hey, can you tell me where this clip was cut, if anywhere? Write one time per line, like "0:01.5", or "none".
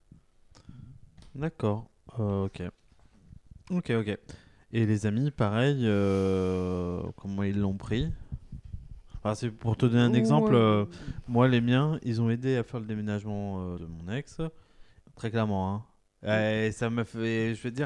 0:13.8
0:15.0